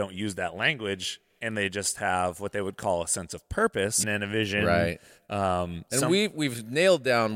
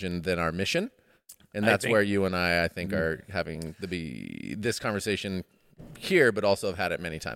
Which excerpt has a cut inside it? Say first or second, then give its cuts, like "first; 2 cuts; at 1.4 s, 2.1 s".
first; 1 cut; at 4.0 s